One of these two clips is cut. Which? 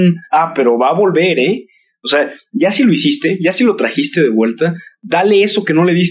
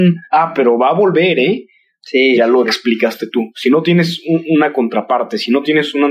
second; 1 cut; at 2.0 s

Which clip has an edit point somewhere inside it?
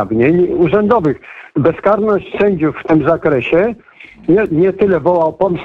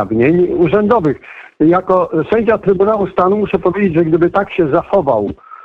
first; 1 cut; at 1.5 s

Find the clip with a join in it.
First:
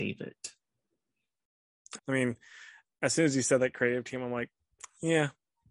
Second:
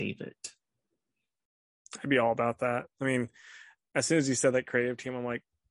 first; 1 cut; at 2.0 s

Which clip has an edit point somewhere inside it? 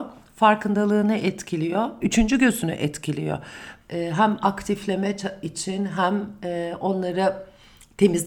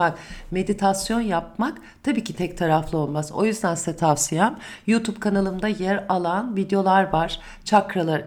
first; 2 cuts; at 2.0 s, 3.8 s

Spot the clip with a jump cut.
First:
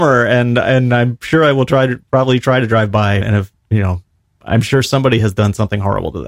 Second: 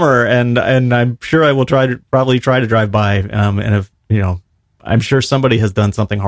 first; 1 cut; at 3.2 s

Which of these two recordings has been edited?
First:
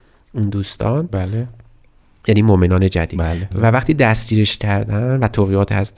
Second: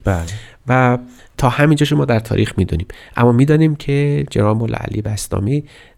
first; 1 cut; at 3.5 s

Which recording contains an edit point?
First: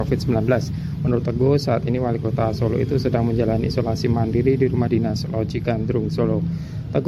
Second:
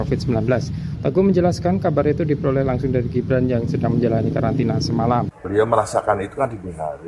second; 2 cuts; at 0.9 s, 5.3 s

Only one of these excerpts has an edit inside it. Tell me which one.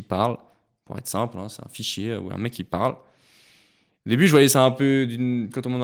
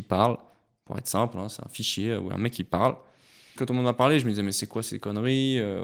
second; 1 cut; at 3.6 s

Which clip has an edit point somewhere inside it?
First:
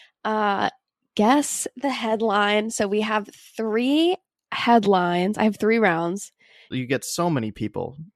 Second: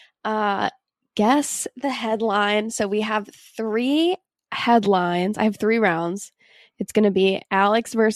first; 1 cut; at 6.7 s

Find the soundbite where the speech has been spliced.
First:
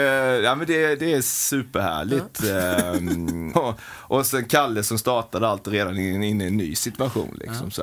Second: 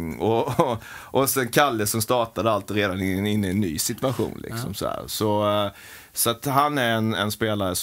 first; 1 cut; at 3.5 s

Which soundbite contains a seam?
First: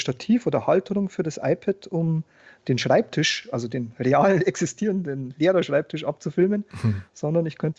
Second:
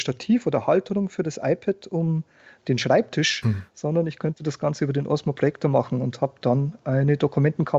second; 1 cut; at 3.4 s

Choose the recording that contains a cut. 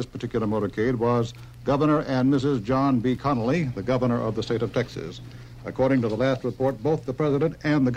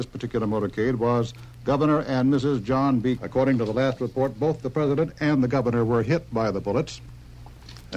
second; 1 cut; at 3.2 s

